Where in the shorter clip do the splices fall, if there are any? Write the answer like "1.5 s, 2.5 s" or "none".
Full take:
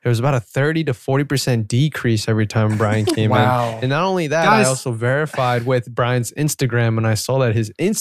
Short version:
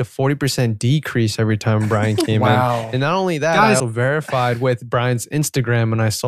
3.8 s